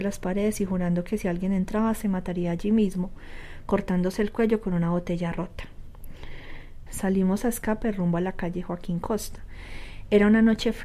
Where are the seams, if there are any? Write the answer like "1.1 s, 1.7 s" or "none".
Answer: 6.9 s